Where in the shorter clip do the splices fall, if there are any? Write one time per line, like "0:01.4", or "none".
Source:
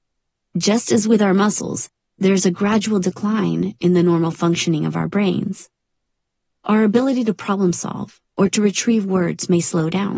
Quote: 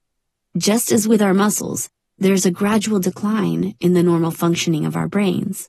none